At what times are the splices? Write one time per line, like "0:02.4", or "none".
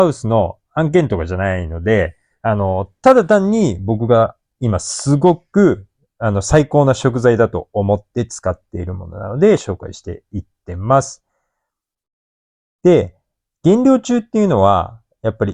none